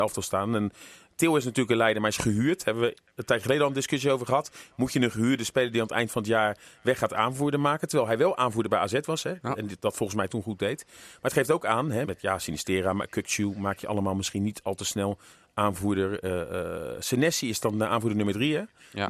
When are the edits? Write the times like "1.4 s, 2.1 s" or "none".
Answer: 12.0 s